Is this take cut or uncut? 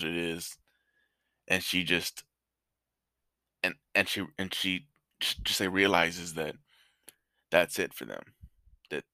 uncut